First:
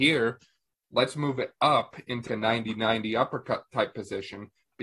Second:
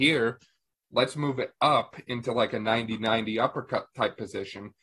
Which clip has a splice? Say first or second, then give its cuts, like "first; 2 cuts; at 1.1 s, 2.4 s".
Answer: first; 1 cut; at 2.3 s